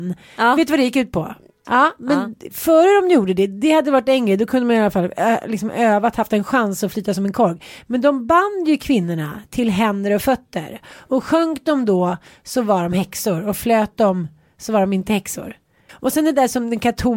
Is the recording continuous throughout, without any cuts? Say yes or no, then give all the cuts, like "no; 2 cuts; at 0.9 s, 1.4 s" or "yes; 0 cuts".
no; 2 cuts; at 1.6 s, 15.9 s